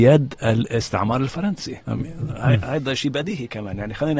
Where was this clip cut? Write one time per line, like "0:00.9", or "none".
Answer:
0:01.8

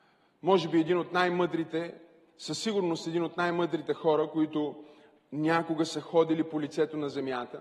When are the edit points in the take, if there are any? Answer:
none

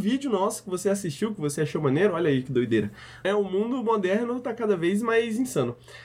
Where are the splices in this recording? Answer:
0:03.2

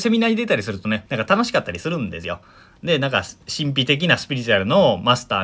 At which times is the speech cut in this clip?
0:01.1

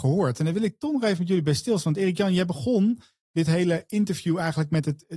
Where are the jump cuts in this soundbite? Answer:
none

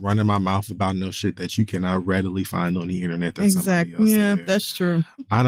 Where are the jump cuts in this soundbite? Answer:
none

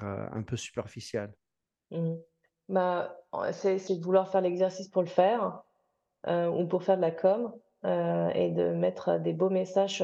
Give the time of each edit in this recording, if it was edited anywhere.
0:03.9

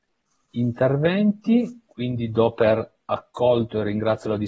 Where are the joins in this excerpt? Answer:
none

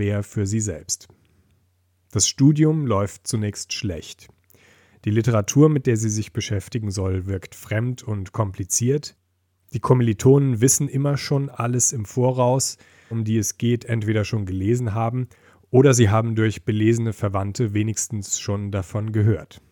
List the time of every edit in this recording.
0:13.1

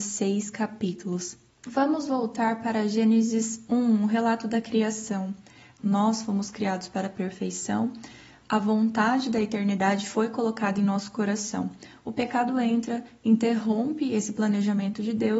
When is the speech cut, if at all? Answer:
0:01.5
0:05.8

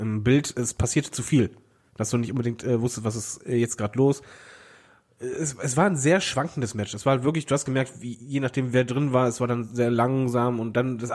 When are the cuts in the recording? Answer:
0:01.9

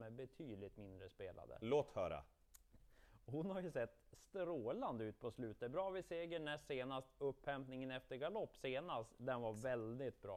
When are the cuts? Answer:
0:02.8

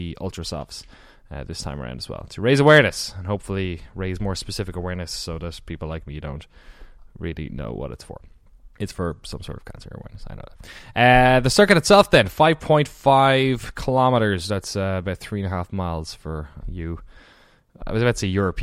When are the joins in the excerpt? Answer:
0:08.7
0:16.6

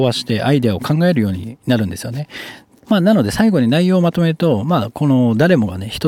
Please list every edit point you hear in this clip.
0:02.8

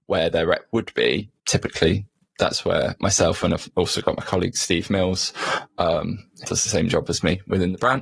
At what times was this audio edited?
0:01.4
0:06.4

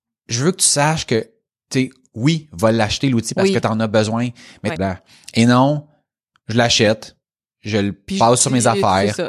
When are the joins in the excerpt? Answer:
0:04.7

